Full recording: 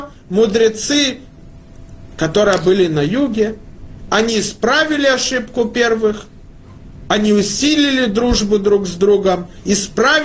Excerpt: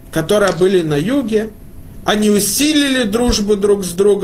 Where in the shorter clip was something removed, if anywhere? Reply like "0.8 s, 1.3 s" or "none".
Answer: 2.0 s